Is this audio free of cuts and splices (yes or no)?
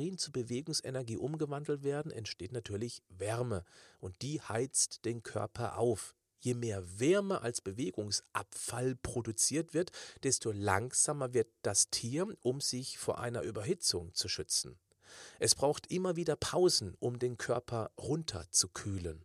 yes